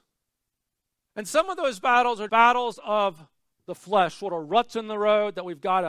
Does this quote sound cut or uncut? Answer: cut